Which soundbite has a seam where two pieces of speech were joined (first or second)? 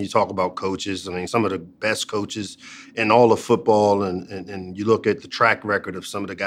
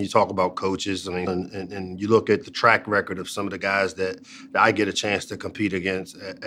second